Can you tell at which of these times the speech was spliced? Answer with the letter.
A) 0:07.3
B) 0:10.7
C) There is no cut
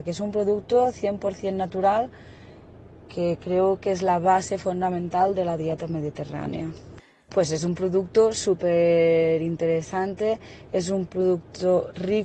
A